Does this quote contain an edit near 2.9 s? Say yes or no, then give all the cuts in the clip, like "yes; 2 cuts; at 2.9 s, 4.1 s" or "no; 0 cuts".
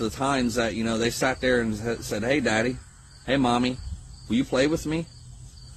no; 0 cuts